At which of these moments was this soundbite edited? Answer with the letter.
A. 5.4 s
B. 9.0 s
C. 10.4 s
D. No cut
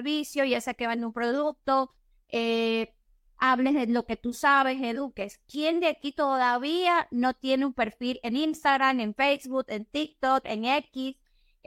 C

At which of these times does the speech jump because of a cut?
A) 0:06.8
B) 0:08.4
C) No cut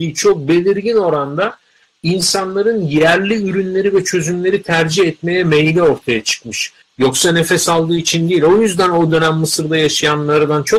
A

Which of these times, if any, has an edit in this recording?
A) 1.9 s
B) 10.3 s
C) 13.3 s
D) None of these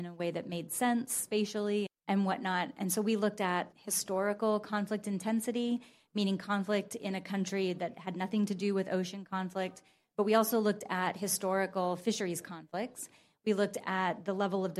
A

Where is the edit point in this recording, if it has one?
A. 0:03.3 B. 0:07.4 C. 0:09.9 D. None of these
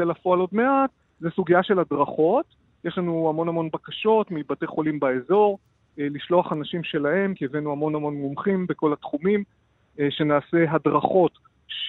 D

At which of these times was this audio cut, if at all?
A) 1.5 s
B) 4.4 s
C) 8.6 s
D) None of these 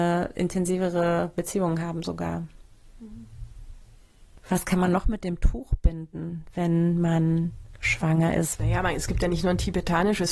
C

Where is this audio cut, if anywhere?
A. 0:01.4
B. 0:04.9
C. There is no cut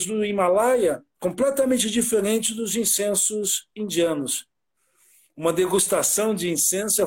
C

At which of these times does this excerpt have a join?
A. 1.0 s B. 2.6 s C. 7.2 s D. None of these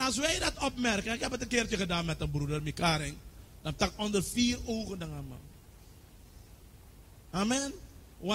D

